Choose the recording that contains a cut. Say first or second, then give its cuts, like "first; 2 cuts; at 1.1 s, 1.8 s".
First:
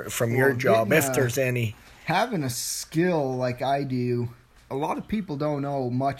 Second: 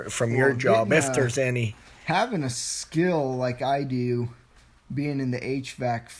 first; 1 cut; at 4.7 s